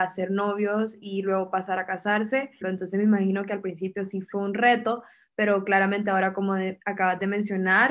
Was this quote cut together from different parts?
yes; 1 cut; at 2.6 s

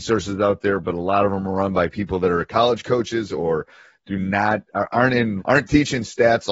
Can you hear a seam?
yes; 1 cut; at 5.4 s

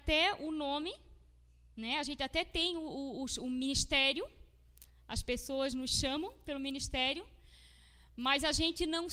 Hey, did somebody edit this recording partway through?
no; 0 cuts

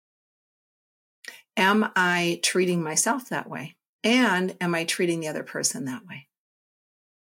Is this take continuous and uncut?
yes; 0 cuts

